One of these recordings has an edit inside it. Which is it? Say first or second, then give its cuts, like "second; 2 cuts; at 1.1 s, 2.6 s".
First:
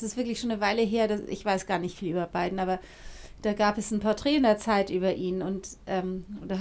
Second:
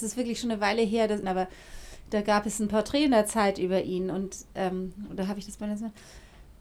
second; 1 cut; at 1.2 s